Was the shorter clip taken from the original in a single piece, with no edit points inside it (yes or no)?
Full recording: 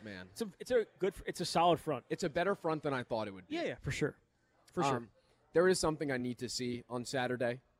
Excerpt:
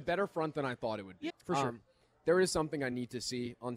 no